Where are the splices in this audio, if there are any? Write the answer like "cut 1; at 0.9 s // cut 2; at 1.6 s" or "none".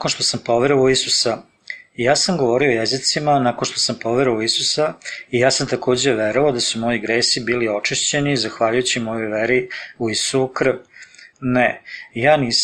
cut 1; at 11.3 s

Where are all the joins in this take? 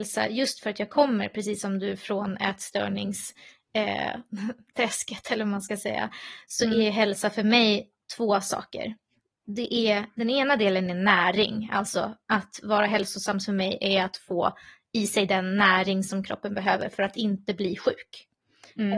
none

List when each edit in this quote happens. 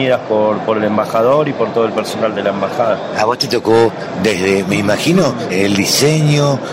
cut 1; at 5.5 s

